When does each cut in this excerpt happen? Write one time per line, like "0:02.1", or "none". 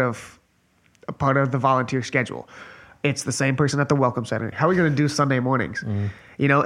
0:04.5

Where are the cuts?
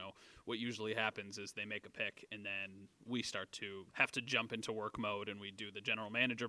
0:03.9

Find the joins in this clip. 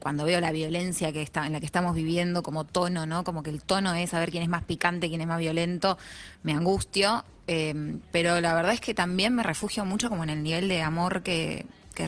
none

